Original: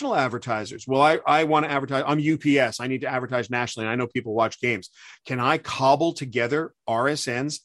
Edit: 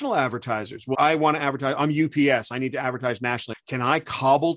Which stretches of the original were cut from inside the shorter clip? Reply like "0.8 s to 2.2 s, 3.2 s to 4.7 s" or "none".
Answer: 0.9 s to 1.2 s, 3.8 s to 5.1 s